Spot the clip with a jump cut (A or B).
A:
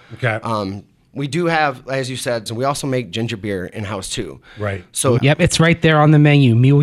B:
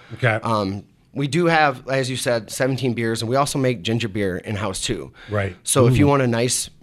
A